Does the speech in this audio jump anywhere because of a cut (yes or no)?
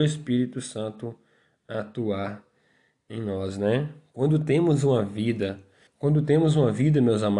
yes